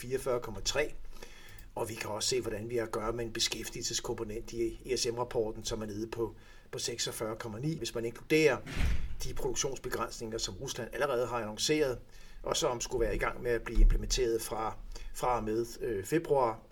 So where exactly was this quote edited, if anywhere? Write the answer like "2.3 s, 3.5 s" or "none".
7.8 s